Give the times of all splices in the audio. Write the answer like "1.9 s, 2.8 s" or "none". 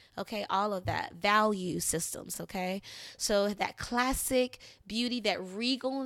none